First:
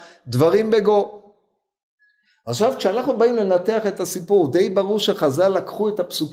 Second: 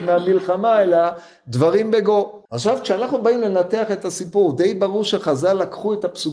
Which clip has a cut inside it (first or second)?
second